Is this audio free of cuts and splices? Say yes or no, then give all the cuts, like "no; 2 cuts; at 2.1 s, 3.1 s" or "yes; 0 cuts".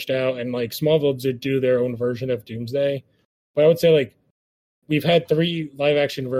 yes; 0 cuts